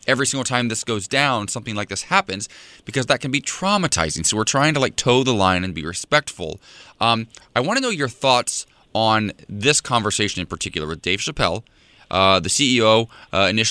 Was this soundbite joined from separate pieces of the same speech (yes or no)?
no